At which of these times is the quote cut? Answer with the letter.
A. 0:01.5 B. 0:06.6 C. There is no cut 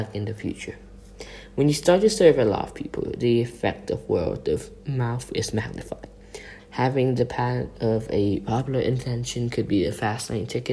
B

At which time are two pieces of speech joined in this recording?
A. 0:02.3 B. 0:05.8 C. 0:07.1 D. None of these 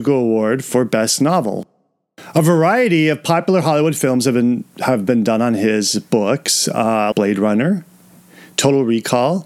C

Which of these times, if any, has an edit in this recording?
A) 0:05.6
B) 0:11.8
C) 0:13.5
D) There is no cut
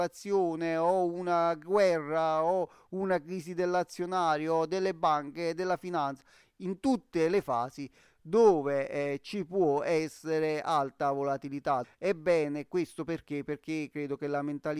B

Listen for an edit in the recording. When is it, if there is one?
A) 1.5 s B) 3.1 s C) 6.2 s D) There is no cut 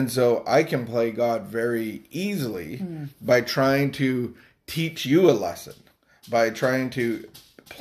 D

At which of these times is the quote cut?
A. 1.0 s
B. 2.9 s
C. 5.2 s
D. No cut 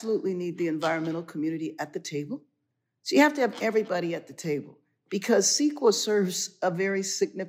D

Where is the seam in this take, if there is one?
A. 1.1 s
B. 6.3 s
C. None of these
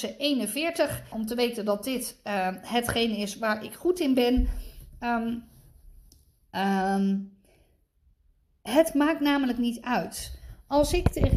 A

